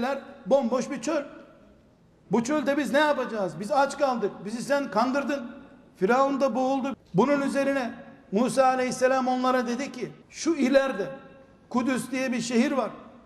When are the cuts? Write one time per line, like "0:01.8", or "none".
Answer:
0:06.9
0:10.2